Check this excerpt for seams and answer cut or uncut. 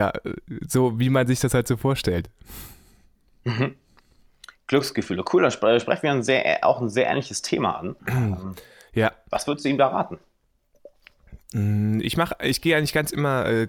cut